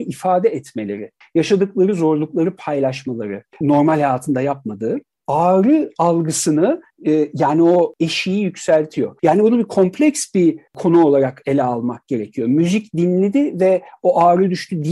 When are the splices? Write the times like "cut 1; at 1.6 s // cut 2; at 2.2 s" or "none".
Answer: cut 1; at 3.6 s // cut 2; at 9.2 s

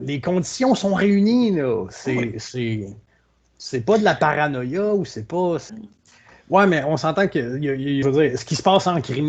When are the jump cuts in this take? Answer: cut 1; at 5.7 s // cut 2; at 8.0 s

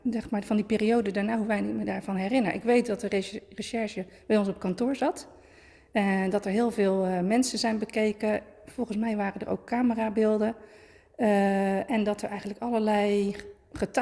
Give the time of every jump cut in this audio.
none

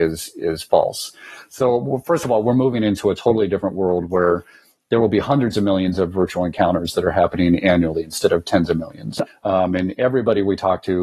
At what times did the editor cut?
cut 1; at 9.3 s

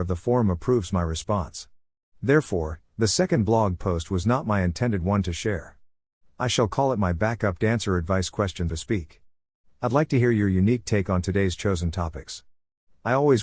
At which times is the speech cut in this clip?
cut 1; at 8.7 s

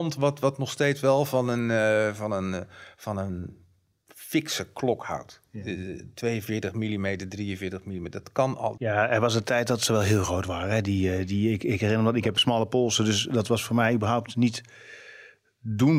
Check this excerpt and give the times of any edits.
cut 1; at 8.8 s

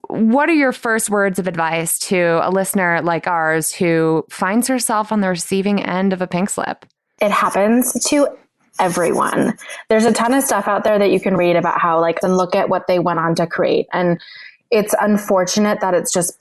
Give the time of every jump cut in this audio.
cut 1; at 12.2 s

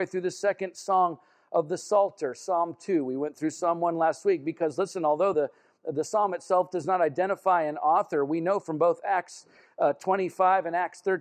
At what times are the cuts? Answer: none

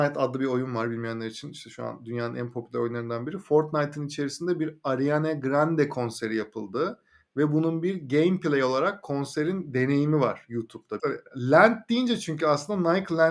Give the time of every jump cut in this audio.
cut 1; at 11.0 s

